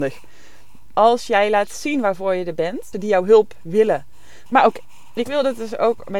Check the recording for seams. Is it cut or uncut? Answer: cut